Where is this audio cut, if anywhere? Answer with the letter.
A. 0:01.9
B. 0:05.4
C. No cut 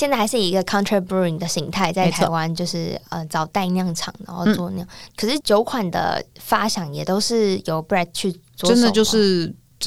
B